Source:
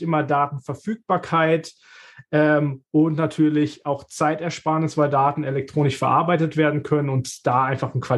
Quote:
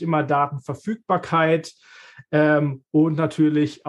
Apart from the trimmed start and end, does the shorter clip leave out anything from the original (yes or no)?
no